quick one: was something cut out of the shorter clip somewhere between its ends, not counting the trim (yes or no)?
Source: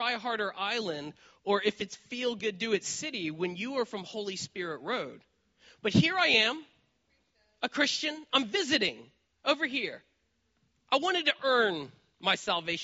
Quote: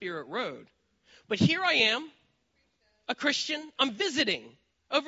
no